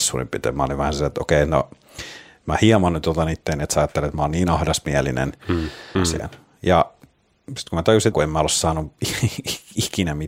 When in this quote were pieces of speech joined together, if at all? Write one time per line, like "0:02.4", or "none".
0:06.0
0:08.1